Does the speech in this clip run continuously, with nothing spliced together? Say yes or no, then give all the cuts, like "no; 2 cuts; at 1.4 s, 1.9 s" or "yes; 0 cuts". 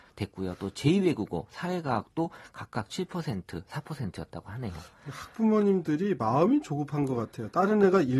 yes; 0 cuts